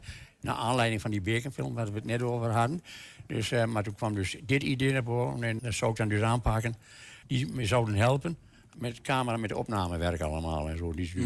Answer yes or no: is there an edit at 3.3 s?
no